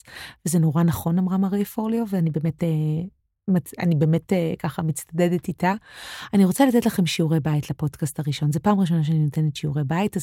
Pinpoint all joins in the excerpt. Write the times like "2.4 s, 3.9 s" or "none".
none